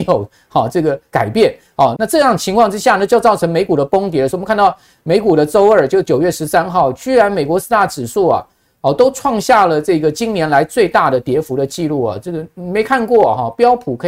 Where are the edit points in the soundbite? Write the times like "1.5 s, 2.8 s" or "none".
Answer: 2.0 s